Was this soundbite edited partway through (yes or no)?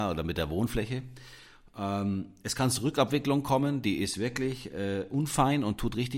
no